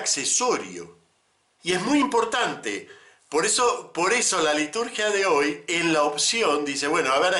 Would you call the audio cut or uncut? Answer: cut